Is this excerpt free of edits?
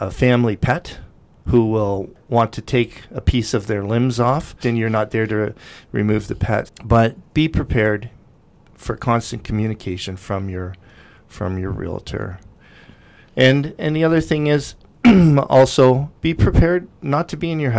no; 2 cuts; at 4.6 s, 6.7 s

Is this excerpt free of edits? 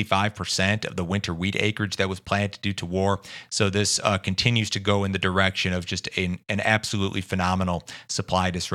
yes; 0 cuts

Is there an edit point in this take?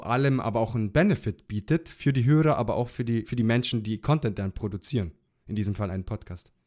no; 0 cuts

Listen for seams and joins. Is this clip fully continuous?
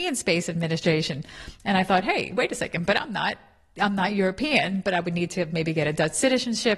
yes; 0 cuts

